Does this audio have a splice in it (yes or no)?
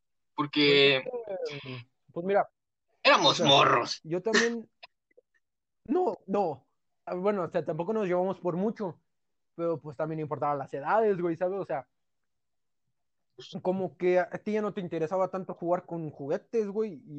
yes